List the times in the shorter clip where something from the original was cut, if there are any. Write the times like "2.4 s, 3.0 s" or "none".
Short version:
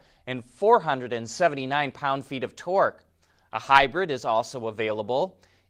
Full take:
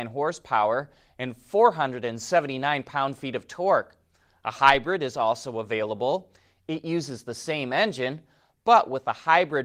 none